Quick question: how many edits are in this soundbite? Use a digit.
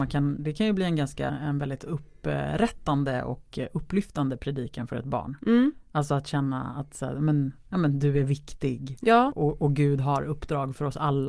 2